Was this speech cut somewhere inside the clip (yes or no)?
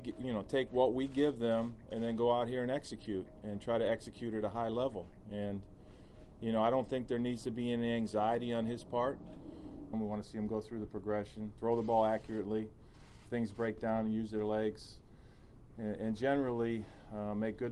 yes